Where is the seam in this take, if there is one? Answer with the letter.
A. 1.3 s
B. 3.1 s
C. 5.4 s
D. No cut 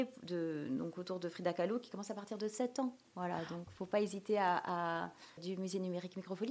C